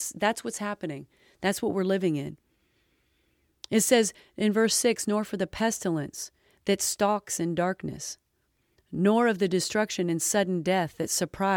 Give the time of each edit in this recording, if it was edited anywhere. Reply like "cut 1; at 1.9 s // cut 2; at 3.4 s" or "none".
none